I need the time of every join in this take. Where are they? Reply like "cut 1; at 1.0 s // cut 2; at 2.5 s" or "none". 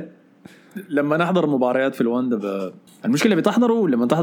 cut 1; at 2.9 s